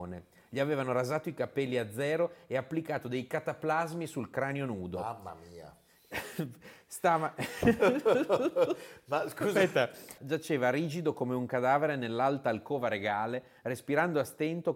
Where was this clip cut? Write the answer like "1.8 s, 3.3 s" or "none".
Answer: 10.2 s